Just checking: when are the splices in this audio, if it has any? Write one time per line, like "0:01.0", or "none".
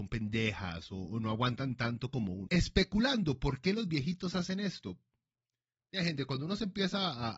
0:02.5